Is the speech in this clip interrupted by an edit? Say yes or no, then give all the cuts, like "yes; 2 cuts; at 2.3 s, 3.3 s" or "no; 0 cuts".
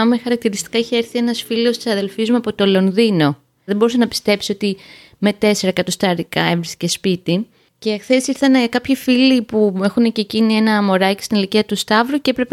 yes; 1 cut; at 3.7 s